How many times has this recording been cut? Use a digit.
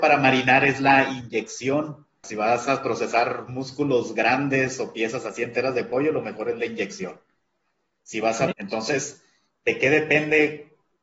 2